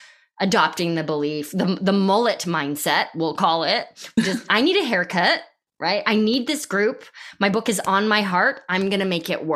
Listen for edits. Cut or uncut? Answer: uncut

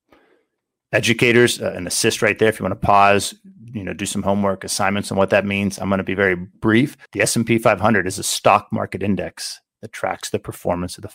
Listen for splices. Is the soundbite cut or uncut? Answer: cut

